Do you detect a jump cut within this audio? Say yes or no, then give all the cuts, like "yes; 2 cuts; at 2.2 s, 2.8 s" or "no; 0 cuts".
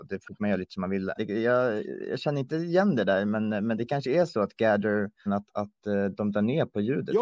yes; 2 cuts; at 1.2 s, 5.3 s